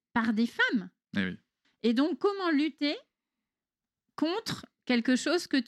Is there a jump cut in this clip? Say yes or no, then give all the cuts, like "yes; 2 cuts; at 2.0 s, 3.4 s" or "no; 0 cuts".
yes; 1 cut; at 1.6 s